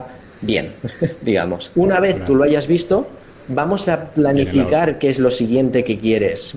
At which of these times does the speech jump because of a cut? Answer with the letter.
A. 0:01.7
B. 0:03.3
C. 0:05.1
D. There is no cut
A